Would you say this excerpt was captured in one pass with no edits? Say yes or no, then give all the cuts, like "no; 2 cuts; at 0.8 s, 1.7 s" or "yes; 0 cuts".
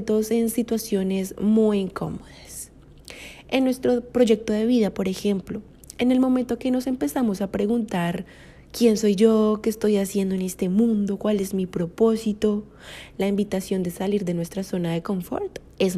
yes; 0 cuts